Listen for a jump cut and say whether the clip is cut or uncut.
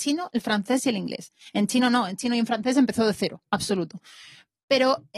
cut